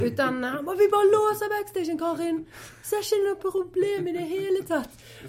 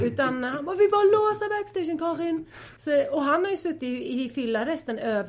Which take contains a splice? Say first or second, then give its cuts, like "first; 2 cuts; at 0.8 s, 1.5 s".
second; 1 cut; at 2.8 s